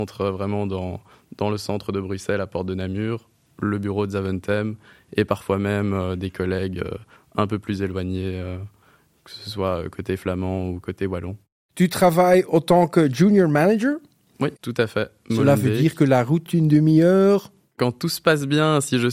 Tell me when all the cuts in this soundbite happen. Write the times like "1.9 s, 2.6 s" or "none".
10.8 s, 14.5 s, 16.5 s